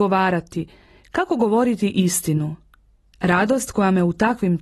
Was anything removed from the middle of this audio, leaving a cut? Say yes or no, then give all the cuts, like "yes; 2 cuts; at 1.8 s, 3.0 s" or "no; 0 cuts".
yes; 1 cut; at 3.1 s